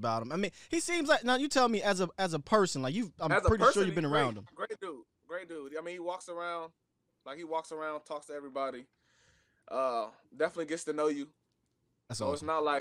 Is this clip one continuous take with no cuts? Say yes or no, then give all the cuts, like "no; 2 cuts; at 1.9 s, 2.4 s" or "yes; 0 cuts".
yes; 0 cuts